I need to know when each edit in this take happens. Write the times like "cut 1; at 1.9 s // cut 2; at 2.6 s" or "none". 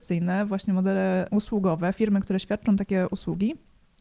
cut 1; at 1.3 s